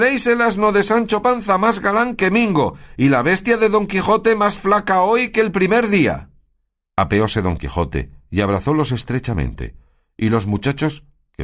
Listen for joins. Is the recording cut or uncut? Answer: cut